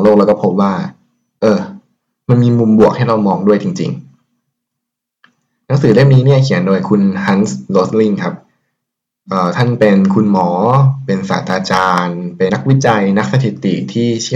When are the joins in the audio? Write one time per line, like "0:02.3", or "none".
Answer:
0:12.5